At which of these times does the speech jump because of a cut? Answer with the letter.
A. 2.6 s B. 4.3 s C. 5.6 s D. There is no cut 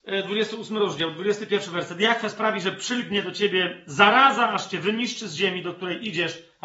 D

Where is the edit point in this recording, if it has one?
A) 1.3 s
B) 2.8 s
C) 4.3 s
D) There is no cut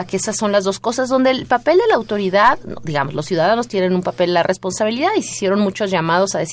D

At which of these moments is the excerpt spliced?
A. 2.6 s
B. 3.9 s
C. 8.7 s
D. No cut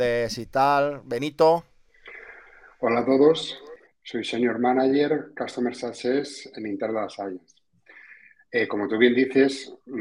B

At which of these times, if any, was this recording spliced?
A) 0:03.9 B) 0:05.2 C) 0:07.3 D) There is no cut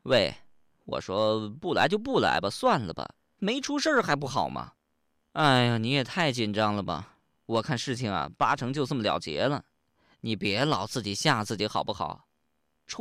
B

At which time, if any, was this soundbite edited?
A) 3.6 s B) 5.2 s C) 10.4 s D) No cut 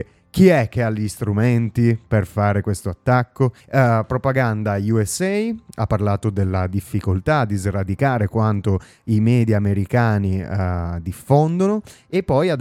A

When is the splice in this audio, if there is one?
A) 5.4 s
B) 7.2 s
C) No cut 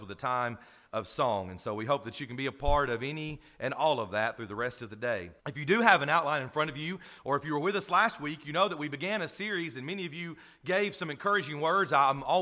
A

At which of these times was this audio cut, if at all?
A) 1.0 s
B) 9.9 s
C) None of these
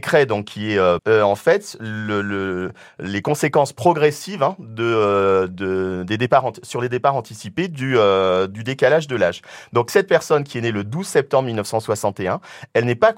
A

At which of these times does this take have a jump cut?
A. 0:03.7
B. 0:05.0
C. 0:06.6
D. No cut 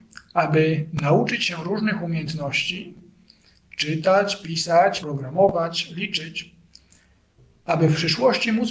B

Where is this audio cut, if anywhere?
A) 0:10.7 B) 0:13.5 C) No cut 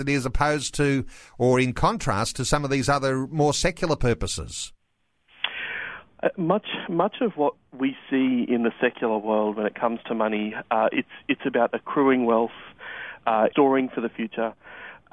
B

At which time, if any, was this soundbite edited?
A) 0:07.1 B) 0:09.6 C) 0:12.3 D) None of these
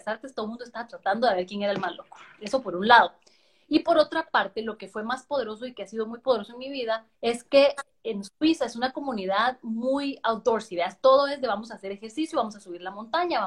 A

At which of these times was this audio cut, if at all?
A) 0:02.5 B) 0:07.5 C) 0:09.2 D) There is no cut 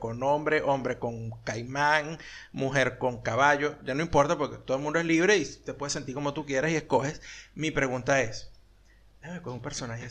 D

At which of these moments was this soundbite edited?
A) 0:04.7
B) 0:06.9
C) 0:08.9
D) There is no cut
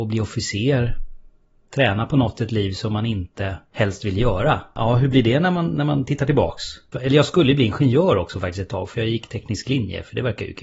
B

